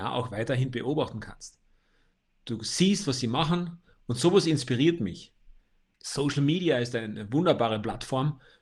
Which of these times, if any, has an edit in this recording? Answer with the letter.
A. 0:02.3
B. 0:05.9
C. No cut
B